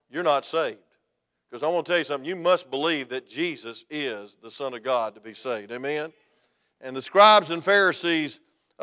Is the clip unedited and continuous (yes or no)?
yes